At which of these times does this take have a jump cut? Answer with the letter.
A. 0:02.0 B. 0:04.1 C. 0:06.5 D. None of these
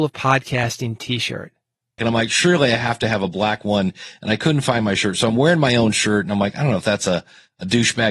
A